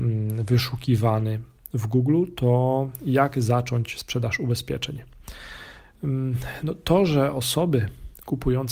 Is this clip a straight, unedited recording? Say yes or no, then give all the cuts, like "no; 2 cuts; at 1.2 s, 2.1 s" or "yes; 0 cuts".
yes; 0 cuts